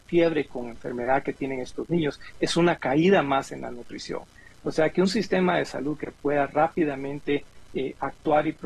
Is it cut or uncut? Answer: uncut